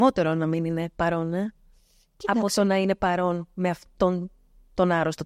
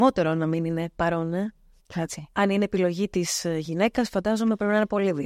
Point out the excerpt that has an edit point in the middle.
second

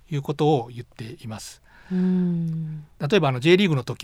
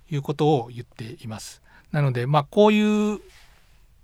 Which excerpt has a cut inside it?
second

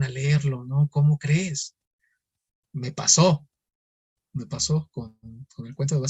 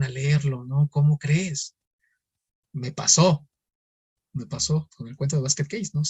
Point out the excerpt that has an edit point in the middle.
second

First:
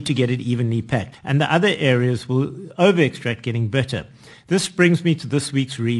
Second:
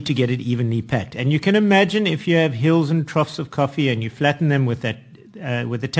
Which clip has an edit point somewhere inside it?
first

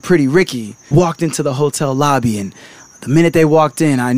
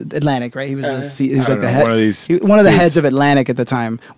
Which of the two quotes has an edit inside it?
first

